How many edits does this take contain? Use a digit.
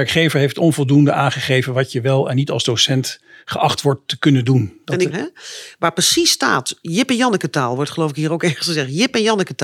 1